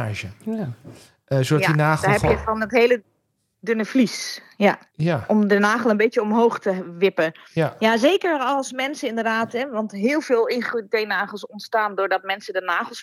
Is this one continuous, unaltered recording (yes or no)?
yes